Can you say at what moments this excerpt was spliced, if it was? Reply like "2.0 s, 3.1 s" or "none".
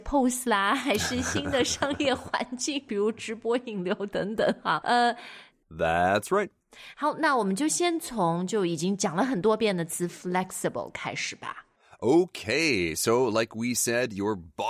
5.5 s